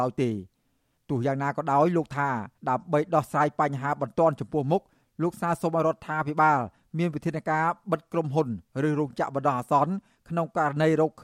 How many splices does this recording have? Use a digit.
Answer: 1